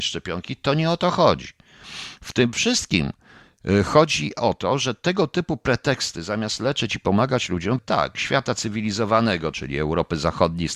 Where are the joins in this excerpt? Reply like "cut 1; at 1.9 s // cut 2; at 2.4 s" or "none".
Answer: cut 1; at 7.8 s // cut 2; at 9.5 s